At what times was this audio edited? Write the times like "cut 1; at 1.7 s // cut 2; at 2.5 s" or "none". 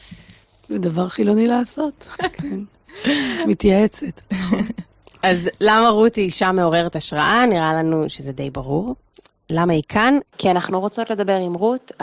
cut 1; at 2.2 s

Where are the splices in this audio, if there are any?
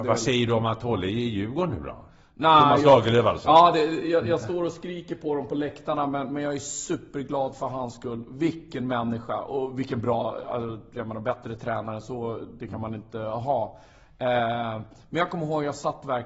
none

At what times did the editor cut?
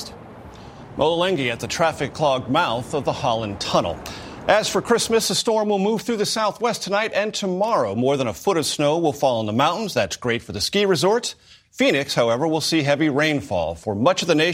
none

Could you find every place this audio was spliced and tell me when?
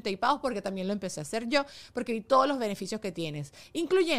none

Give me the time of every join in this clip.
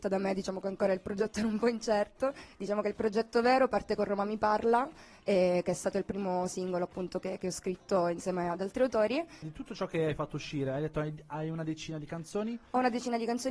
cut 1; at 9.4 s

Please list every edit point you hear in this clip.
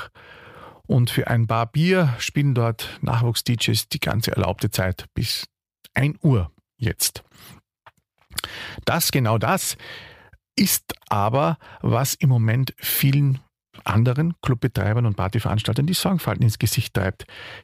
none

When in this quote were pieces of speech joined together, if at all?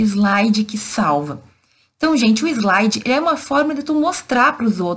none

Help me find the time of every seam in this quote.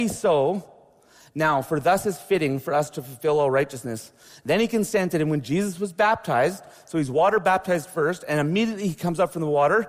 none

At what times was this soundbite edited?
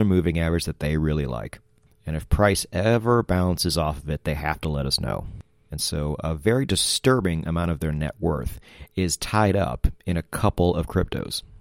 cut 1; at 5.7 s

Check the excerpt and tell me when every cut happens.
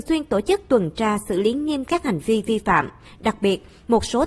cut 1; at 3.1 s

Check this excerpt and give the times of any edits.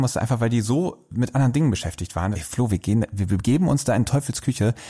cut 1; at 2.3 s

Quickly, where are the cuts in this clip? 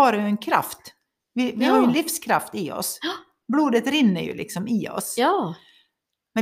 none

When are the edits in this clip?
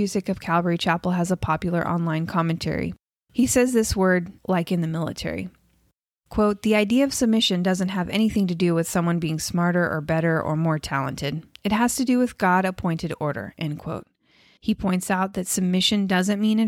cut 1; at 4.4 s // cut 2; at 14.6 s

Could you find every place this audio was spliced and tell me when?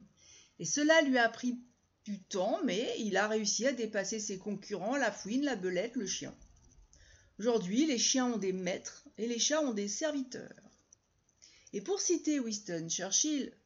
none

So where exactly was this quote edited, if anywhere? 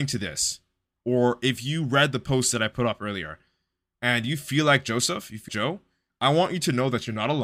cut 1; at 5.5 s

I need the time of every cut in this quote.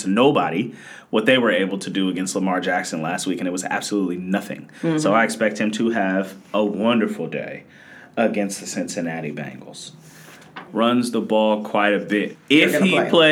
cut 1; at 10.7 s // cut 2; at 12.3 s

